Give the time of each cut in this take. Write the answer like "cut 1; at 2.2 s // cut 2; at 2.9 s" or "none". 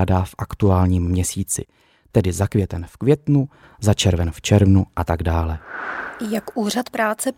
none